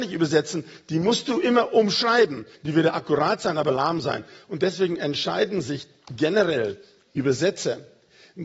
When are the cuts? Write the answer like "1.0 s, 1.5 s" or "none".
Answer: 2.5 s